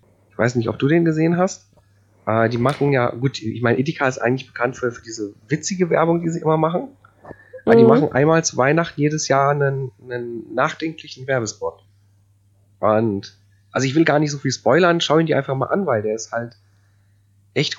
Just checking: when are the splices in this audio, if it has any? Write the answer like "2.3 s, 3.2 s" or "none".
none